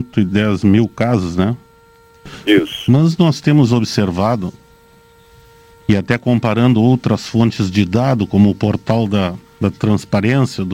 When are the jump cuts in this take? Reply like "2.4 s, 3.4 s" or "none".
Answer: none